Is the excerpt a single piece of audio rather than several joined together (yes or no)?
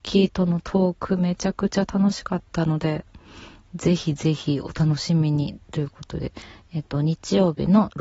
yes